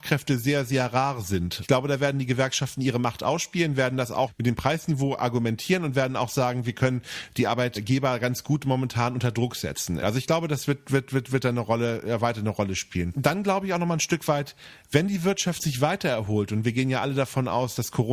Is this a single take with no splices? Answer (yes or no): no